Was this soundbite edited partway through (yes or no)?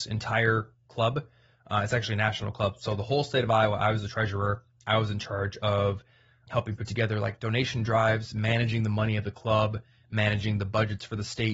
no